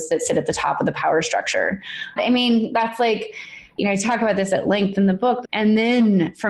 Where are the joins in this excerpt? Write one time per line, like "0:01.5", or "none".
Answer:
0:02.2
0:05.4